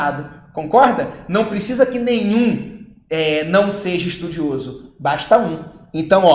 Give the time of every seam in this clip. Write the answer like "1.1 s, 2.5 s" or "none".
none